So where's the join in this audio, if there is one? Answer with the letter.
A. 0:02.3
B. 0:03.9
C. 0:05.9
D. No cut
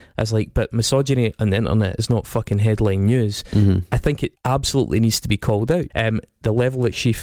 C